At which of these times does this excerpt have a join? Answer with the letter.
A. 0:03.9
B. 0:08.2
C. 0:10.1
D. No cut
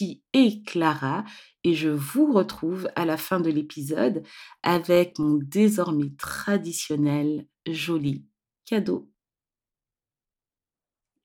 D